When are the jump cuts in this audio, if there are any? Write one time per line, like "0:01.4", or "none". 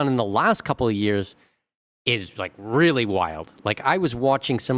none